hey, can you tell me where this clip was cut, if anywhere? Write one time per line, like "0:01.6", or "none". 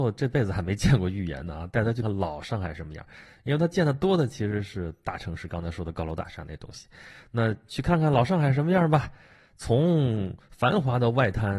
0:02.0

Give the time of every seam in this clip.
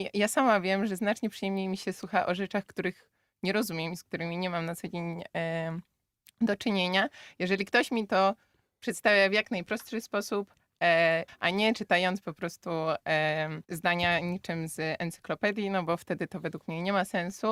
0:11.3
0:13.6

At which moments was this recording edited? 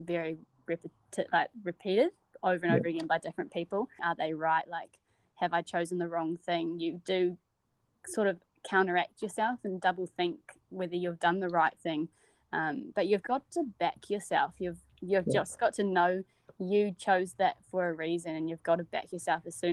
0:04.0
0:13.2

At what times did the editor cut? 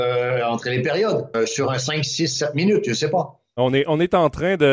0:01.3

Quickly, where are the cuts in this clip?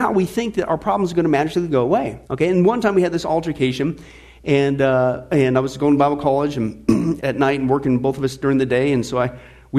0:02.2
0:07.2

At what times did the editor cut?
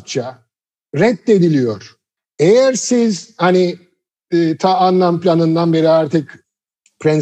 none

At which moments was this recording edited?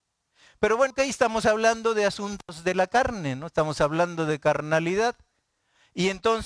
0:00.9

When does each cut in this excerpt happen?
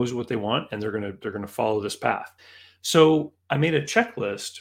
none

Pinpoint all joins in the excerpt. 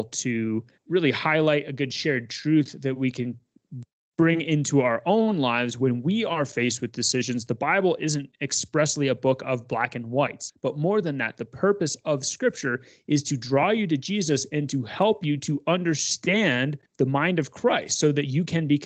0:10.5
0:16.9

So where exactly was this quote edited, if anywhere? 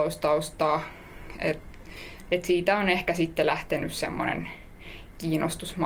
0:02.3

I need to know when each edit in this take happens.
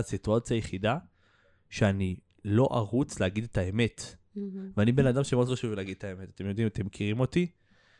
none

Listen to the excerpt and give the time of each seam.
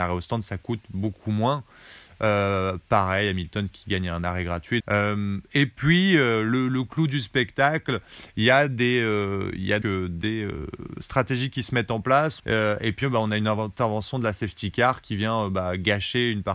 0:04.8
0:09.8
0:12.4

